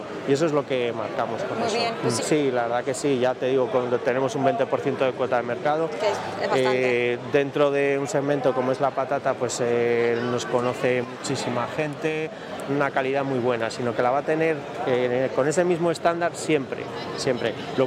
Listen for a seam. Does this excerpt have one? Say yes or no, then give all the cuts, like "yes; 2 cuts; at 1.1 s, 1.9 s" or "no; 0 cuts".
yes; 2 cuts; at 2.2 s, 12.7 s